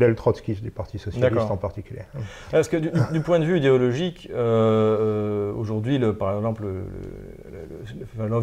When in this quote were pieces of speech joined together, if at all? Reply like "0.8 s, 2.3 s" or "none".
none